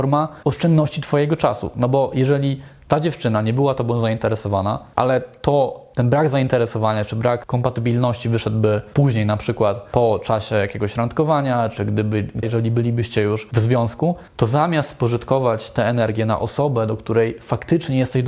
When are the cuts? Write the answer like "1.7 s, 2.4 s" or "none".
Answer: 12.4 s